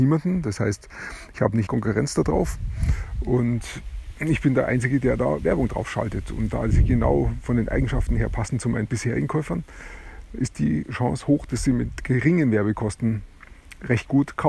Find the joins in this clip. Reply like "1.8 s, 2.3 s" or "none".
1.7 s